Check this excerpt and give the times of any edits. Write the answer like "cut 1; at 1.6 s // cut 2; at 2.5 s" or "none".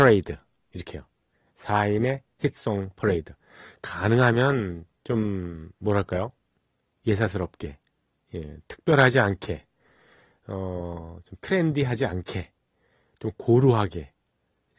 none